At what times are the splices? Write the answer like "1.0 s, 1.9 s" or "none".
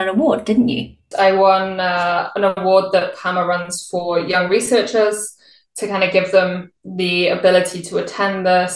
1.1 s

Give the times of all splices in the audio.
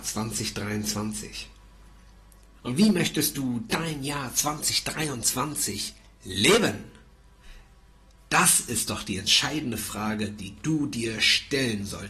2.5 s

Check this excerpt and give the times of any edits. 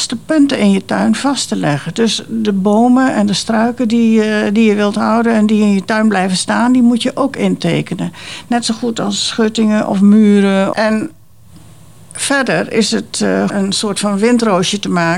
10.7 s, 13.5 s

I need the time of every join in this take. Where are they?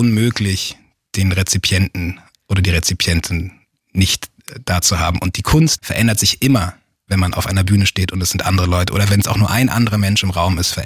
5.8 s

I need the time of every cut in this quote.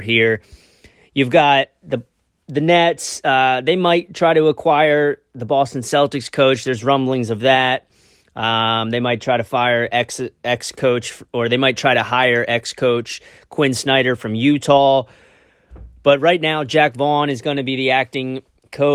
none

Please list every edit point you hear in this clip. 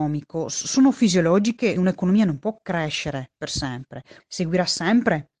1.8 s, 4.2 s

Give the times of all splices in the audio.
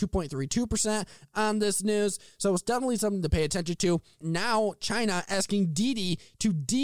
4.2 s

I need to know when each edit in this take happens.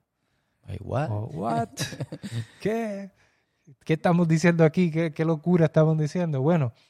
none

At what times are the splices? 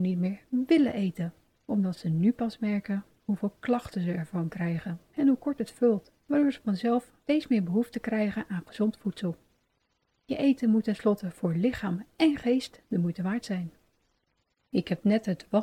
none

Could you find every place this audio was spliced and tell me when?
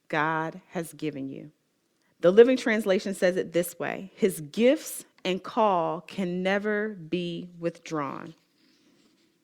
2.0 s

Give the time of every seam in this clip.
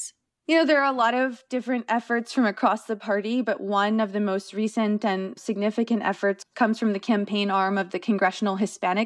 none

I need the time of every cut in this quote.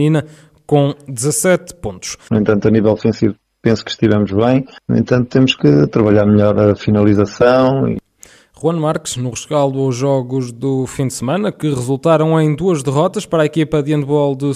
2.3 s

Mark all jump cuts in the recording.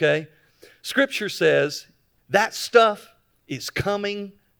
none

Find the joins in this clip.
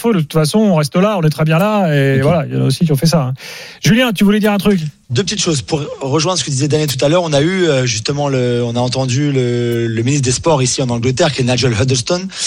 5.1 s

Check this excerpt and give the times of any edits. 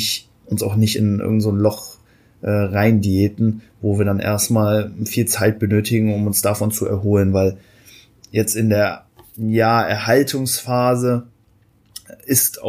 none

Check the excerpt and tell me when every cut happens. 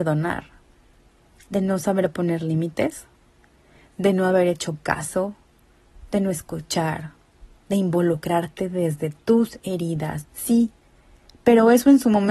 10.2 s

